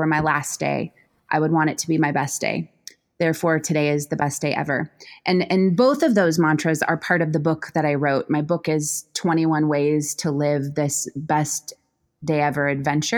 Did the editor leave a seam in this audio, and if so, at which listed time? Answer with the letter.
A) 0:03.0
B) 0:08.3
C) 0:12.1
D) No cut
D